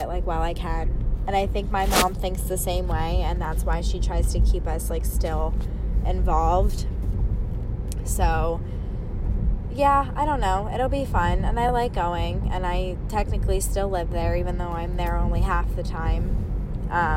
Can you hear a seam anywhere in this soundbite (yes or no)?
no